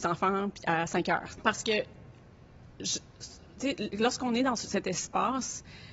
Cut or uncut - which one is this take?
cut